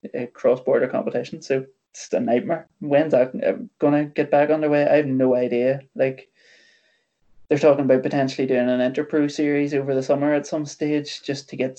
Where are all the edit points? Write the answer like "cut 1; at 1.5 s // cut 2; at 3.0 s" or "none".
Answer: none